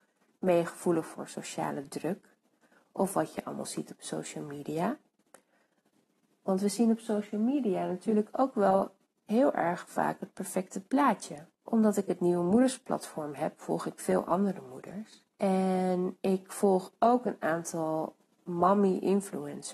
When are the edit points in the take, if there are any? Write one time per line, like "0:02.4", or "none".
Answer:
0:11.5
0:15.3

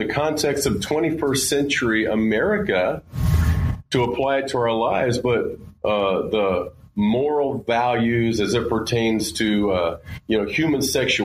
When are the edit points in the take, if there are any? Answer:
0:05.7

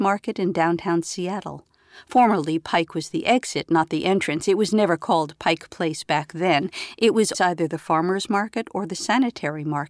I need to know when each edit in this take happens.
0:07.3

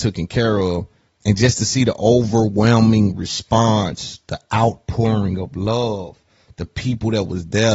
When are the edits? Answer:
0:01.1

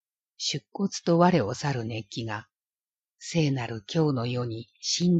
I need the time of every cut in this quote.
none

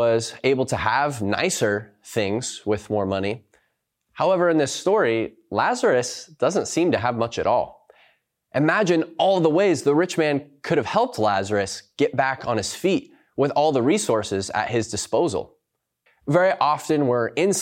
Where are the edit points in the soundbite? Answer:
0:16.1

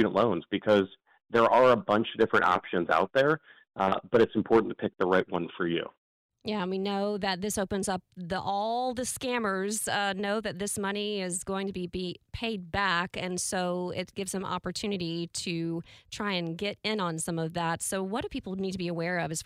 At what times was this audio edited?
none

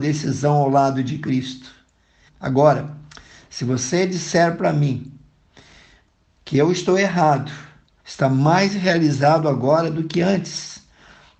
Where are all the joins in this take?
0:02.3
0:08.0

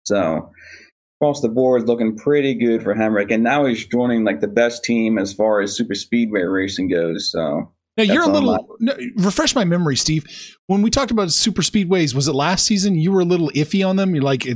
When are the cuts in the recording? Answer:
none

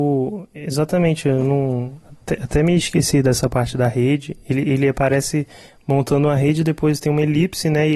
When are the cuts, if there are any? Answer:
none

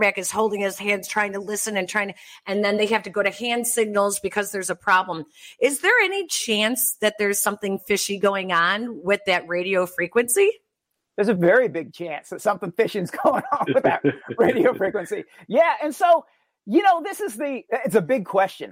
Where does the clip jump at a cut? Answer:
none

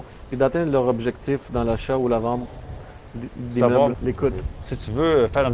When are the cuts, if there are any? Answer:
0:03.9

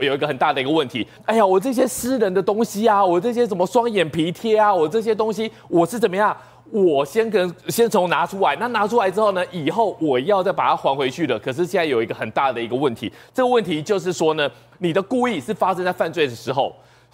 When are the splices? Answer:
0:01.2

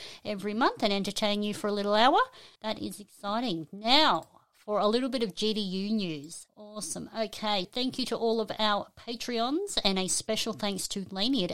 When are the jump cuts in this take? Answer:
0:02.6
0:06.5
0:07.6

